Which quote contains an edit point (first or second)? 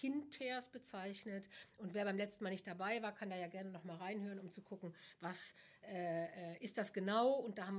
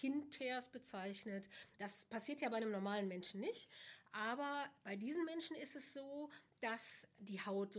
second